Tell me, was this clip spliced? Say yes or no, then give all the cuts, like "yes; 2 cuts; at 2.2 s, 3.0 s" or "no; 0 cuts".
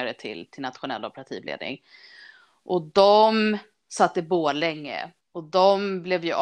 yes; 1 cut; at 5.2 s